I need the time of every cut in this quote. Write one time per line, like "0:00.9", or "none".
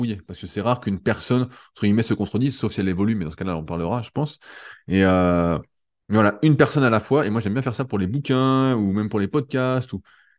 none